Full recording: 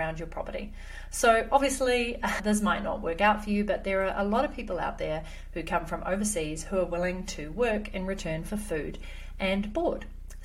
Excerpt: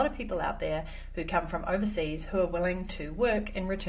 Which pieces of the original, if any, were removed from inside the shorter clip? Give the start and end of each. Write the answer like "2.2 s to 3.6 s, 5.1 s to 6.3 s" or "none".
none